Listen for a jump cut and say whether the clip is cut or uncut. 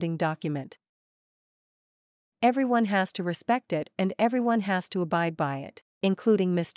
uncut